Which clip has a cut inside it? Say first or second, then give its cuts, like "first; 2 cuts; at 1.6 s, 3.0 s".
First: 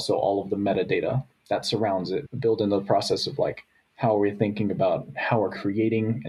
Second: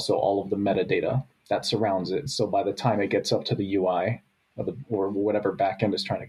first; 1 cut; at 2.3 s